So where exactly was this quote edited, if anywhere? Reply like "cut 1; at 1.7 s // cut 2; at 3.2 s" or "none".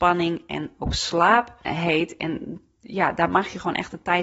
cut 1; at 1.7 s